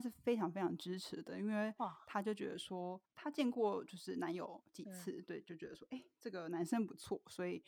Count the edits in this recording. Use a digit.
1